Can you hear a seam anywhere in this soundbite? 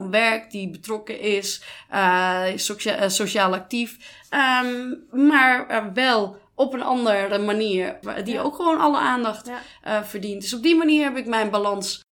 yes; 1 cut; at 8.0 s

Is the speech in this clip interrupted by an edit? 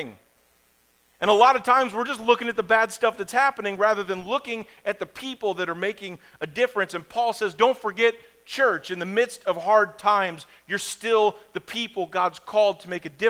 no; 0 cuts

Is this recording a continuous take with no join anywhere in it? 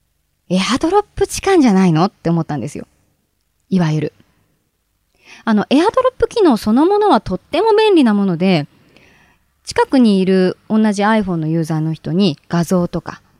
yes; 0 cuts

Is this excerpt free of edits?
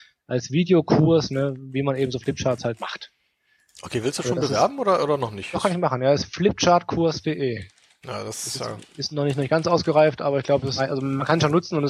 yes; 0 cuts

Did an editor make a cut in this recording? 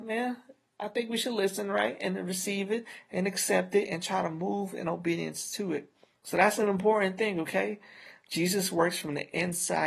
no; 0 cuts

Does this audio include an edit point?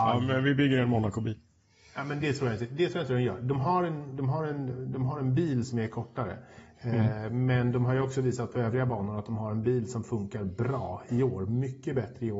no; 0 cuts

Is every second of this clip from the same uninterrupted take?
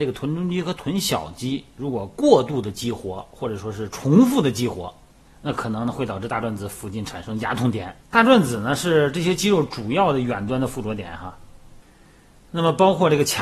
no; 1 cut; at 8.0 s

